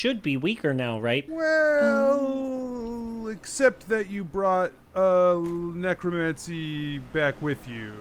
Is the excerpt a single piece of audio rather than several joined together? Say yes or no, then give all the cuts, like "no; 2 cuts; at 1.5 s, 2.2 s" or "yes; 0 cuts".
no; 1 cut; at 1.3 s